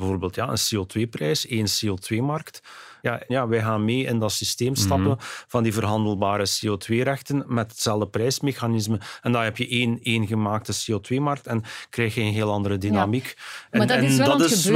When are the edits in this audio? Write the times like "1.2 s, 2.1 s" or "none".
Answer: 3.3 s